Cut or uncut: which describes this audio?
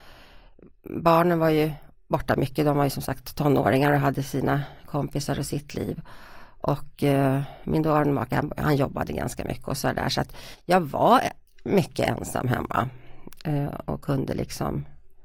uncut